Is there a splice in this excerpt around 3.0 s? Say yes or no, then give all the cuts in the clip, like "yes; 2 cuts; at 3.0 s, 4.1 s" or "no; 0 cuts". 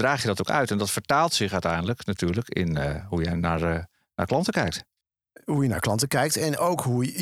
no; 0 cuts